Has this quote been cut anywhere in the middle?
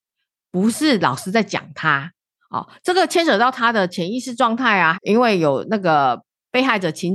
yes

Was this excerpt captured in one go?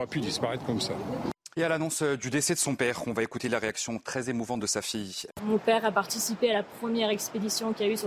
no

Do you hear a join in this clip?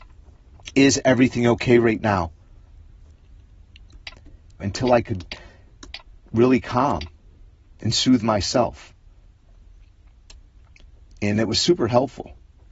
yes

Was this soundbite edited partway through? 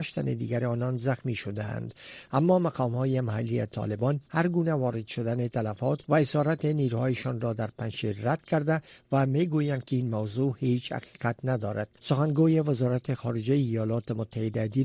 yes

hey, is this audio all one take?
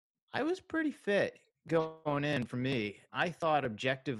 no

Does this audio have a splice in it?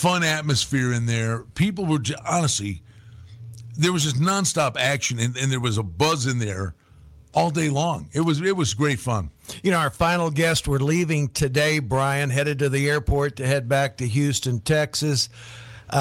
no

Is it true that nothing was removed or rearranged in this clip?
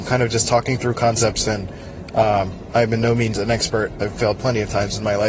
no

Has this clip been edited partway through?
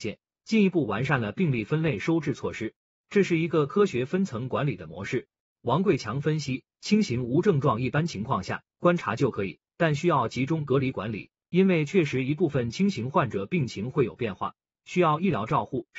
no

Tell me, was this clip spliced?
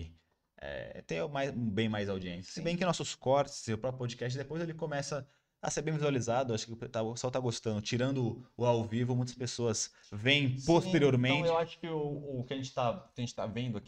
no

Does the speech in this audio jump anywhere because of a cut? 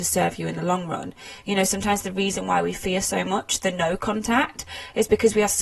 no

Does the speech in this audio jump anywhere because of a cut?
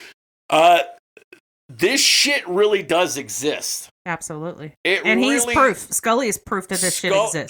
no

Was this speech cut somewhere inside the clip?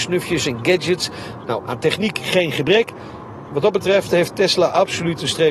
yes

